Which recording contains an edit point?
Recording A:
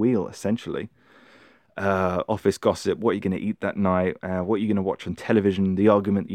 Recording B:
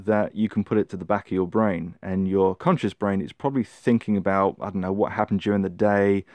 A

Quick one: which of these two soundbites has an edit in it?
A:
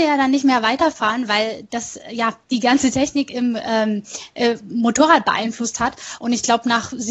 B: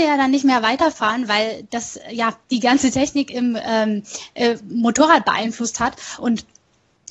B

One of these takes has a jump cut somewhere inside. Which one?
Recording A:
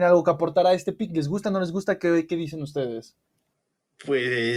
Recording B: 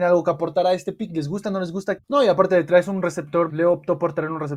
B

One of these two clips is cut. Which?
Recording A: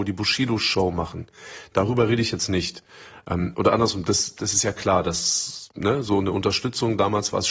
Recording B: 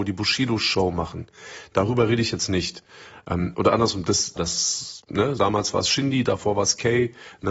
B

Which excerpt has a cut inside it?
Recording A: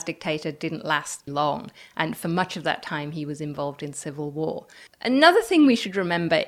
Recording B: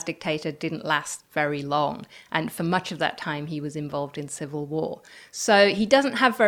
A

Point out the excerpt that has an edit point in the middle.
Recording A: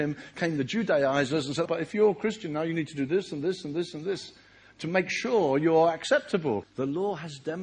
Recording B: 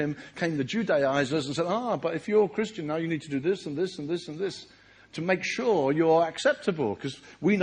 A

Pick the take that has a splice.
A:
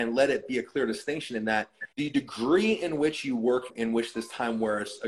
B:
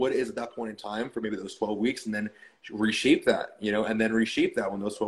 A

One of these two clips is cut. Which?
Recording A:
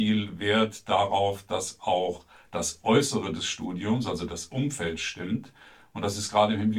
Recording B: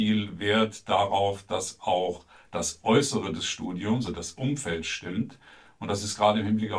B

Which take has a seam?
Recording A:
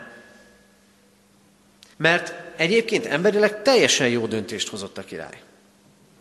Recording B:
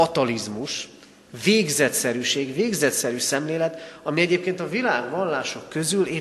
A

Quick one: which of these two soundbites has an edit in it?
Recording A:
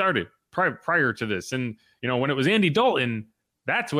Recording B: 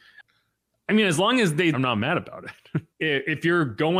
B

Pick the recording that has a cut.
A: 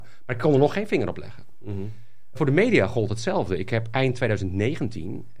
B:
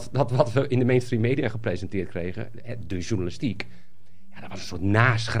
A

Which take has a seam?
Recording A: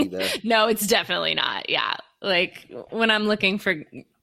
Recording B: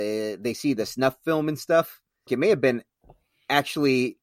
B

